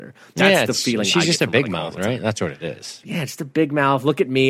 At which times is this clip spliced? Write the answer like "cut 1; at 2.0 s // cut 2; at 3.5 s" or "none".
cut 1; at 3.0 s